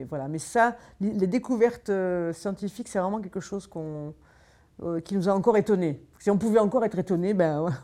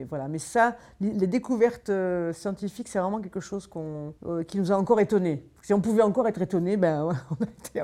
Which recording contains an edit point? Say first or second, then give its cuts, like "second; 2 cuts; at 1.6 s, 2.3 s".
second; 1 cut; at 4.2 s